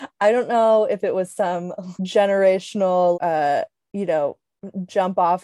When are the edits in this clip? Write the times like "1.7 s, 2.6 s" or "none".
2.0 s, 3.1 s